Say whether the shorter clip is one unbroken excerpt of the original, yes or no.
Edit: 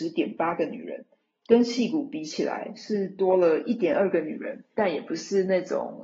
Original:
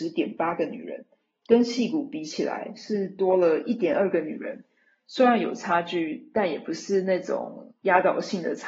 no